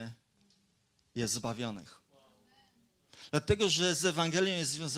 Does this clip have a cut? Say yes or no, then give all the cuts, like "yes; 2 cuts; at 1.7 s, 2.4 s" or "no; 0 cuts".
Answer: no; 0 cuts